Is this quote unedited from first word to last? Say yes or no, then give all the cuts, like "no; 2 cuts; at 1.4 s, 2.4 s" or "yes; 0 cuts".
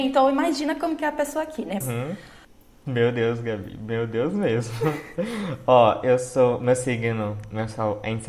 no; 1 cut; at 1.8 s